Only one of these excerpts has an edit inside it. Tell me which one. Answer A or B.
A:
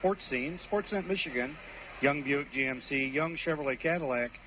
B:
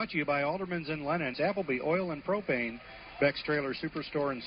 B